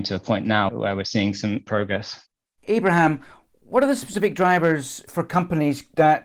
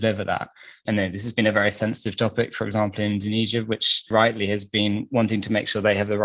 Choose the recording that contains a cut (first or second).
second